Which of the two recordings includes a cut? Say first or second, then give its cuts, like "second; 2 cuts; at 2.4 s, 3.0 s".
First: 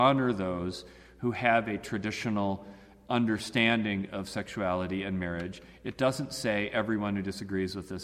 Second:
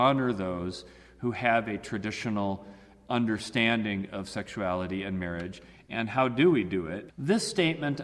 second; 2 cuts; at 5.8 s, 7.1 s